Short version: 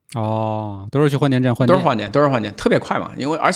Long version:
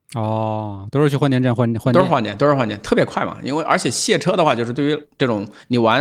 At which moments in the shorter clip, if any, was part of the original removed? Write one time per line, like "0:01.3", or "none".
0:01.6